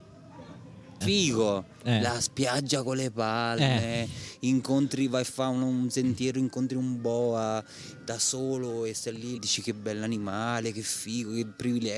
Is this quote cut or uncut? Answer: cut